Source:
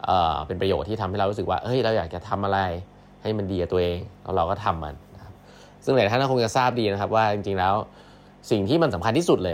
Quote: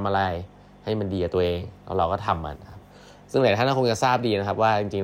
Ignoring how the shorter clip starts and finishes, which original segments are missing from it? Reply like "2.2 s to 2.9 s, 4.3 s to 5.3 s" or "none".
4.9 s to 5.1 s